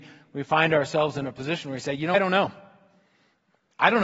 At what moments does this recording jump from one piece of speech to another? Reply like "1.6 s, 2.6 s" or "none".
2.1 s